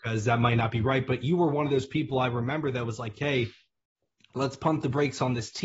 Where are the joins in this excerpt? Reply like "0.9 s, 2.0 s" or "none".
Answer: none